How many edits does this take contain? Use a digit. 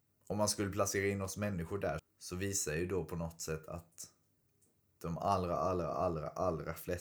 1